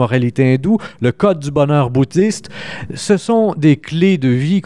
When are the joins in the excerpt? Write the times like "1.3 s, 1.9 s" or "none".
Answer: none